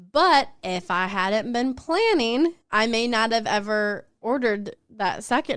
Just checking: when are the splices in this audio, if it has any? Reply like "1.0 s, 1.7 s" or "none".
2.6 s